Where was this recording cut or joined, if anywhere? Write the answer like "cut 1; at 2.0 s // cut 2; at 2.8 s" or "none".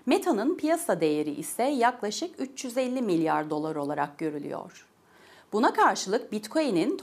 none